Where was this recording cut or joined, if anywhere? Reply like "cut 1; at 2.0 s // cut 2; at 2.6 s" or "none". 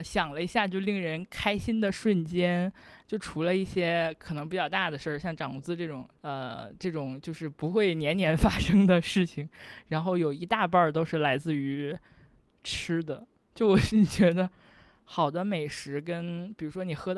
cut 1; at 6.2 s